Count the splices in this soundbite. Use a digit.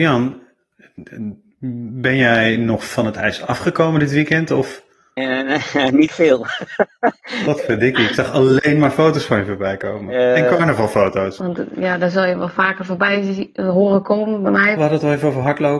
2